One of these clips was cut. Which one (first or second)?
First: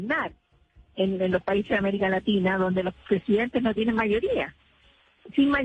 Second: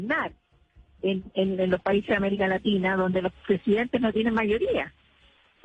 first